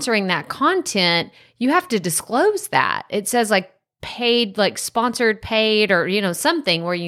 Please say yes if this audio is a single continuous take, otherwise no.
yes